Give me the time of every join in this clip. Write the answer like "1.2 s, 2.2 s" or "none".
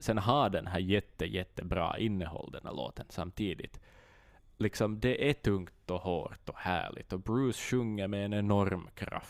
none